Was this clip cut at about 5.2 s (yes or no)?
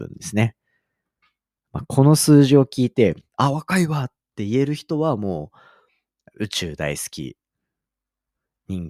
no